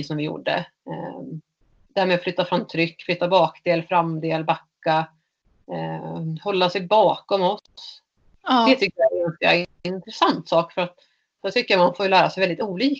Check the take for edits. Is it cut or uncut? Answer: uncut